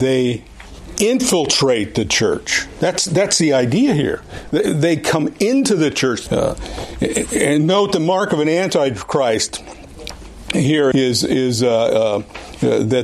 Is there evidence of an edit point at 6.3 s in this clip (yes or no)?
yes